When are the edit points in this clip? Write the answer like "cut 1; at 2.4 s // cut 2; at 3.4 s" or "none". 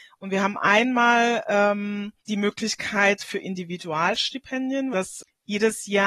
cut 1; at 2.2 s // cut 2; at 4.9 s